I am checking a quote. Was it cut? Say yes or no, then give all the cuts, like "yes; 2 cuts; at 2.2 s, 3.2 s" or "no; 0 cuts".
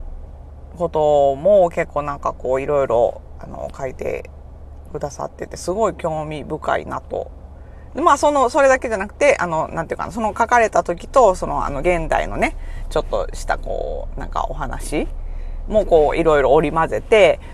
no; 0 cuts